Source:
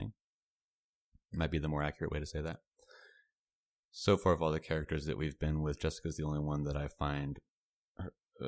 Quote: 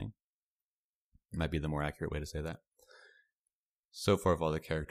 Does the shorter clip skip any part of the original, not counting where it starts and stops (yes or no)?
no